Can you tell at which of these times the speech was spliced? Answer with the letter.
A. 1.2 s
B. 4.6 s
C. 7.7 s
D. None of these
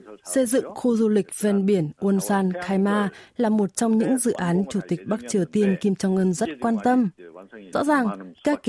C